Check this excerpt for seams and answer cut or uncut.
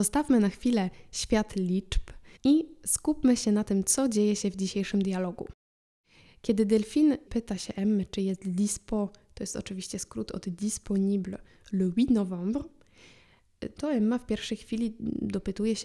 cut